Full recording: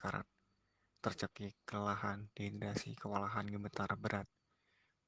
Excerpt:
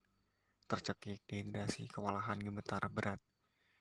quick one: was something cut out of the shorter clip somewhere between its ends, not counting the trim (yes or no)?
yes